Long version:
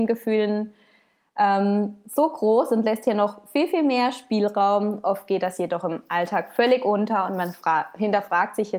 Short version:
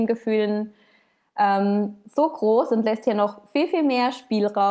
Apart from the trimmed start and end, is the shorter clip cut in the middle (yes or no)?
no